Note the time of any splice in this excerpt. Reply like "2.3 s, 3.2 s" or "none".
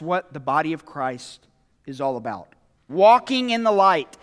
2.9 s